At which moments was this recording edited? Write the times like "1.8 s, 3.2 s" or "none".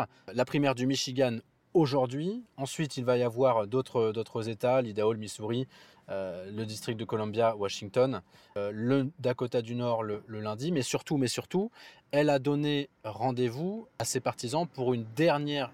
none